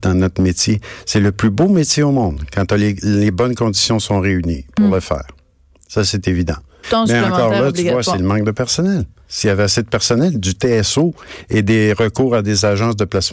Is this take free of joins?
no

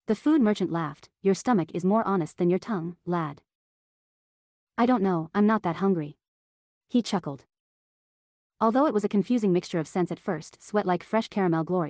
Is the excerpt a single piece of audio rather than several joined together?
no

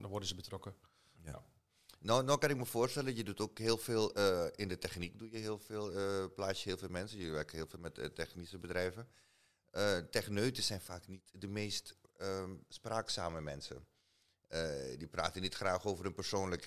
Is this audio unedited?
yes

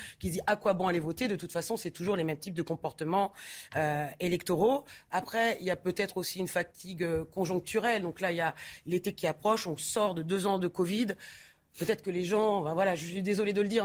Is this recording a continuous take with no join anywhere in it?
yes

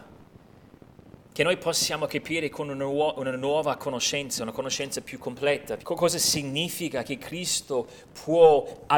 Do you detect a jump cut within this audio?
yes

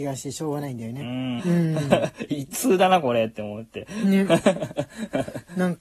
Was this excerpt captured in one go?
no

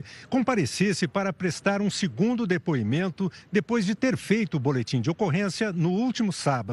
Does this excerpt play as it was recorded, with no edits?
yes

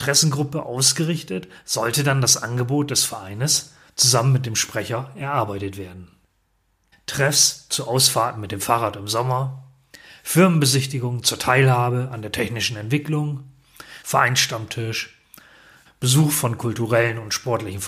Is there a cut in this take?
yes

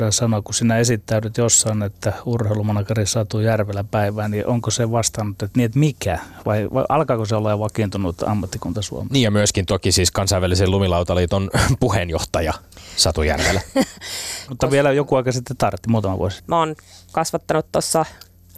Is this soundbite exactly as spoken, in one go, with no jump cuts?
no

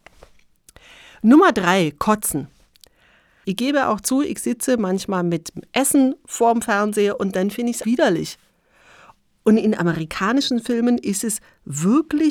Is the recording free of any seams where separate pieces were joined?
no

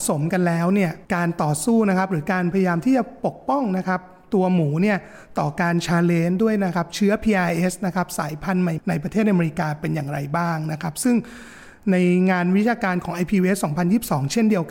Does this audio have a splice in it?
yes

